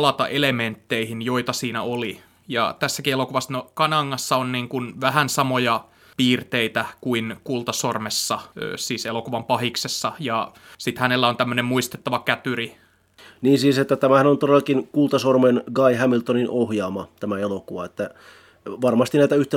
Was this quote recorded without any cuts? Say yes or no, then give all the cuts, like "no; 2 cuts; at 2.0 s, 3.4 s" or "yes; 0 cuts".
yes; 0 cuts